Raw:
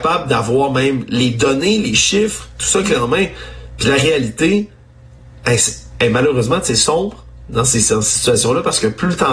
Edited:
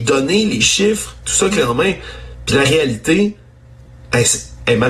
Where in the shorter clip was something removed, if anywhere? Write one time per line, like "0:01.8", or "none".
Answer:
none

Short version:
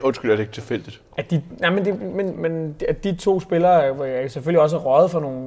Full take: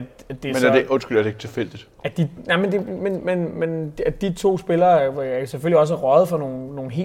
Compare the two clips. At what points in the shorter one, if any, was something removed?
0:02.4

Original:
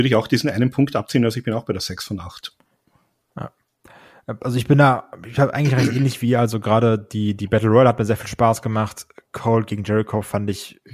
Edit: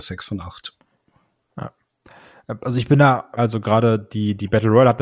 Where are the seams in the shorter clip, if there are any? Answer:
0:03.4

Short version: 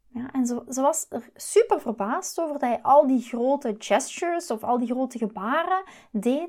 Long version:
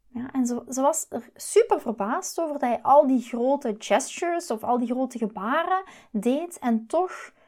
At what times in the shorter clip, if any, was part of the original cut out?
none

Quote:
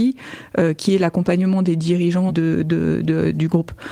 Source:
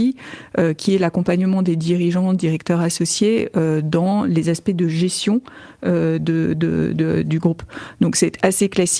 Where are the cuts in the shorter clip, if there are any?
0:02.3

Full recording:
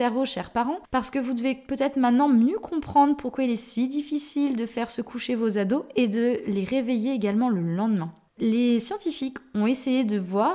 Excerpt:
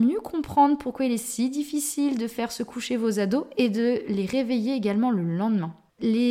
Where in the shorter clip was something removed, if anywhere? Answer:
none

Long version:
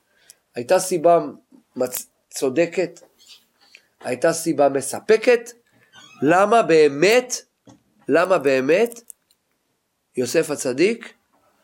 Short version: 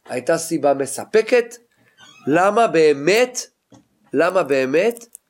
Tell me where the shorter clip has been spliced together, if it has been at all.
none

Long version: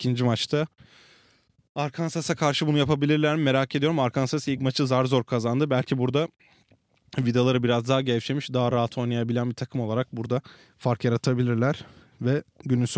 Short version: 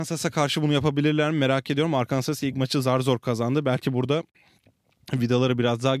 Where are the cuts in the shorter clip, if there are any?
none

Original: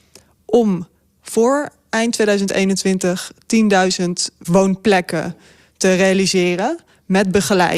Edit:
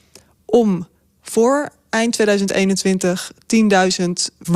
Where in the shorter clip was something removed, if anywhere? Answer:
none

